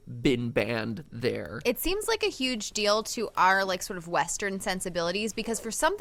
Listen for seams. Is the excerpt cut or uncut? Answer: uncut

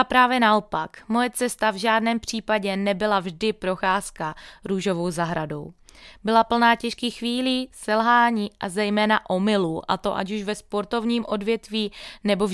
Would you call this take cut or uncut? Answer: uncut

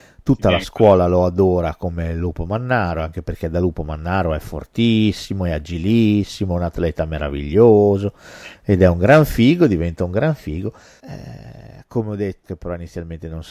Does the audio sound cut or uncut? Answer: cut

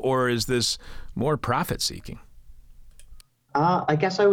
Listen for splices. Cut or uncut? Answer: uncut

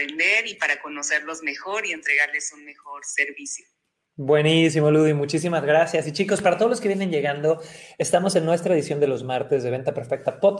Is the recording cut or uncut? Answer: uncut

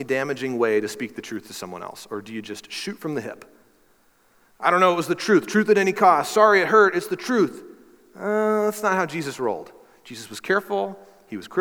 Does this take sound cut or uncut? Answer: uncut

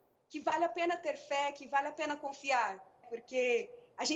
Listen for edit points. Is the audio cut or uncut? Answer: cut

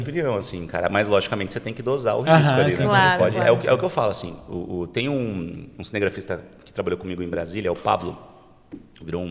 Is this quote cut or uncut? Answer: uncut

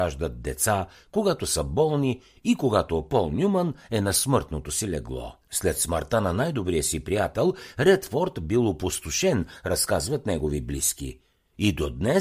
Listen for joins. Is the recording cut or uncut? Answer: cut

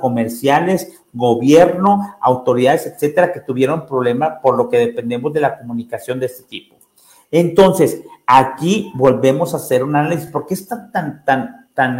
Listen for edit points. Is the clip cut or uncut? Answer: uncut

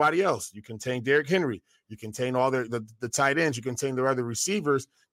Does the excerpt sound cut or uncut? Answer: uncut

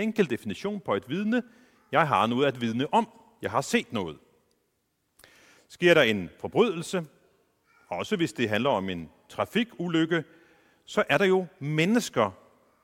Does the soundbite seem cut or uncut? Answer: uncut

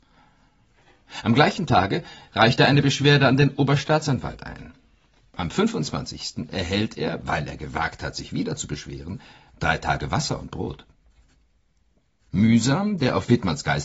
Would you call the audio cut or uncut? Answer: uncut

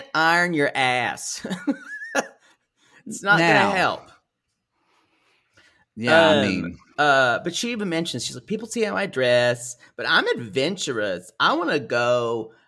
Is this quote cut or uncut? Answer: uncut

